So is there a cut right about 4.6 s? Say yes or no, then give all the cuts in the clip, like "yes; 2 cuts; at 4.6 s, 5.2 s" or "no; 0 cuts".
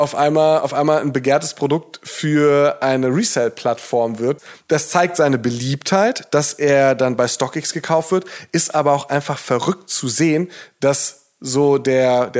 yes; 1 cut; at 4.6 s